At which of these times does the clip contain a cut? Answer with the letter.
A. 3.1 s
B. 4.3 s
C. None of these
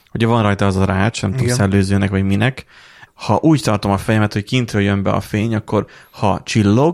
A